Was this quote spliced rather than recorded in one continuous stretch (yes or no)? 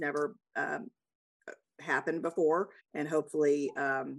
yes